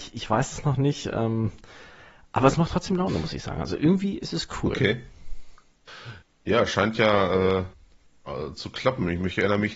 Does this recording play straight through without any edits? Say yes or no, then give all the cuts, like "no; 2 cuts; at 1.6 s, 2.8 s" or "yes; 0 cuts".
yes; 0 cuts